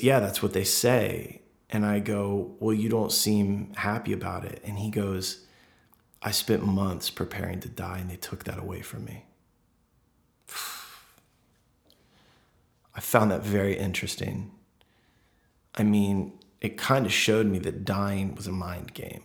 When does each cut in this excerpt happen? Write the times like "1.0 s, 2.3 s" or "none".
none